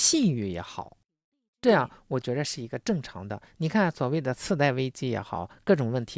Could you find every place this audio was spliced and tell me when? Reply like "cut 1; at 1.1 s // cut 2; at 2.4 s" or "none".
none